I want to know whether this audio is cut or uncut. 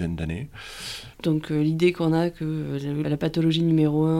cut